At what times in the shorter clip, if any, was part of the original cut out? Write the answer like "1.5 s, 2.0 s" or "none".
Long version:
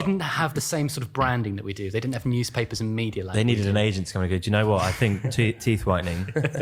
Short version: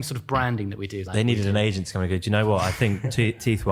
1.1 s